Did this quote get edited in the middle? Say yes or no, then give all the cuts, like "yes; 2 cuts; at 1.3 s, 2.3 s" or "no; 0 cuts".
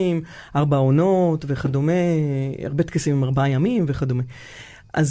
no; 0 cuts